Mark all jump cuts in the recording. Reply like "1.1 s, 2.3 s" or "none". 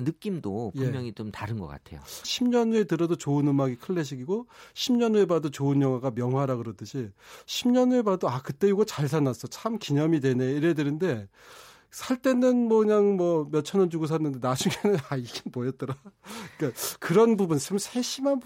2.2 s